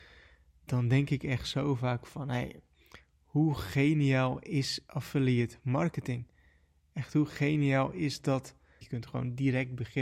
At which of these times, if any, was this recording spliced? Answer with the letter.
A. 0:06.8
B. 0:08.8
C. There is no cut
B